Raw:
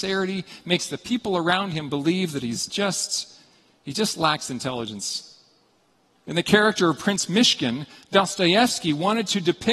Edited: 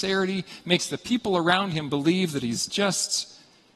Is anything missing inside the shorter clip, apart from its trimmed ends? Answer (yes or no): no